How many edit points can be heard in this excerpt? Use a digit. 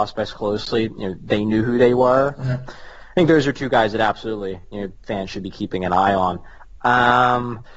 2